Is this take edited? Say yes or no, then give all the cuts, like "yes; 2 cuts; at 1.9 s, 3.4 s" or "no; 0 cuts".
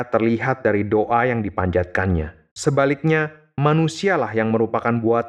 yes; 1 cut; at 2.5 s